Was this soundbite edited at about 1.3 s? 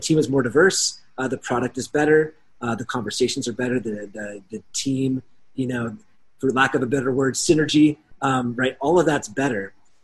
no; 0 cuts

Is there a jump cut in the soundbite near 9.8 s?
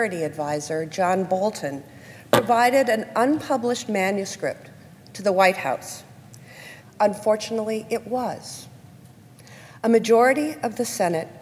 no; 1 cut; at 6.8 s

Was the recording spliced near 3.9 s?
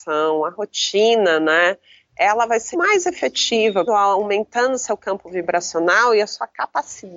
yes; 2 cuts; at 2.7 s, 3.9 s

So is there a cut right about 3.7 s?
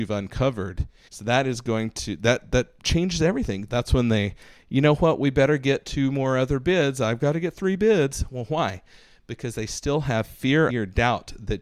yes; 3 cuts; at 1.1 s, 3.7 s, 10.7 s

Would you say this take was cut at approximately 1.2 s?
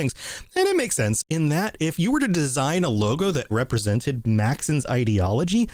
yes; 2 cuts; at 1.2 s, 3.5 s

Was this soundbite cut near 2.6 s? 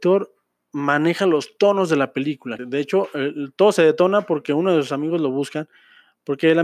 yes; 1 cut; at 2.6 s

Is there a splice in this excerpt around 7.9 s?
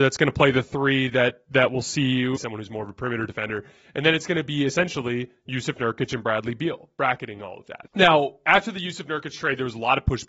yes; 2 cuts; at 2.4 s, 7.9 s

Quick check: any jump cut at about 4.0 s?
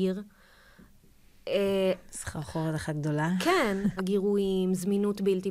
yes; 1 cut; at 4.0 s

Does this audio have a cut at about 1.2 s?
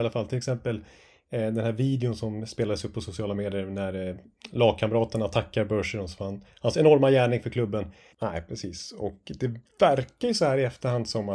no; 1 cut; at 8.1 s

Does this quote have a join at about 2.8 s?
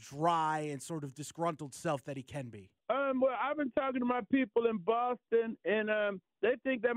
yes; 1 cut; at 2.8 s

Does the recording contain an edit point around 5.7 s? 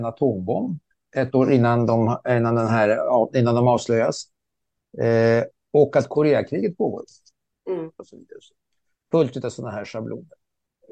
no; 1 cut; at 8.0 s

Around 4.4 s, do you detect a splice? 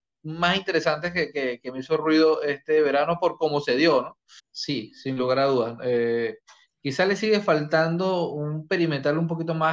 yes; 1 cut; at 4.4 s

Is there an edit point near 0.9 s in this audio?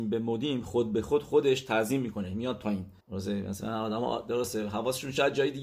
no; 1 cut; at 3.0 s

